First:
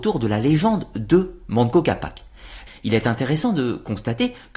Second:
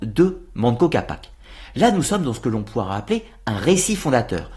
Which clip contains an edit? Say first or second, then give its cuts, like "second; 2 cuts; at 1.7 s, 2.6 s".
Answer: first; 1 cut; at 2.7 s